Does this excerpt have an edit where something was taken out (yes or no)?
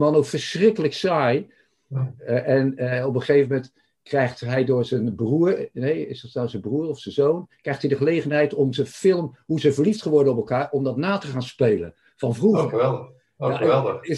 no